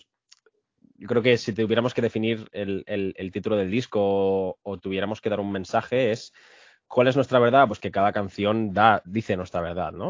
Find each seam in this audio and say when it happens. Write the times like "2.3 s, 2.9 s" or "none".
none